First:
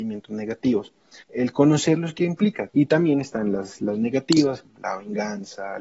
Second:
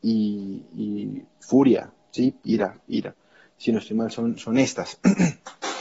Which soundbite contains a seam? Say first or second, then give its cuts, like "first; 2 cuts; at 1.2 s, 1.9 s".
first; 3 cuts; at 1.2 s, 2.7 s, 4.6 s